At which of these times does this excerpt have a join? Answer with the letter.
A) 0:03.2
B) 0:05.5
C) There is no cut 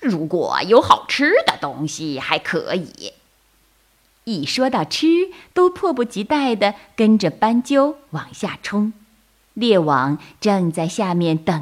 B